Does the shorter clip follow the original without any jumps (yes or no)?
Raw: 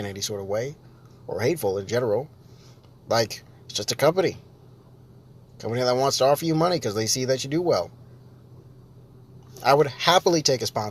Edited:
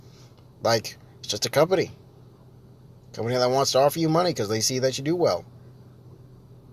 yes